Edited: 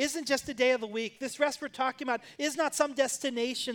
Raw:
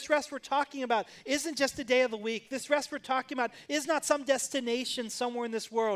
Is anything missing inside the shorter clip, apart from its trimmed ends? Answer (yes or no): no